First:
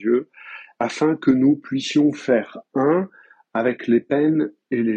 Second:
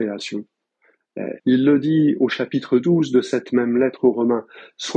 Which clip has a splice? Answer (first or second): second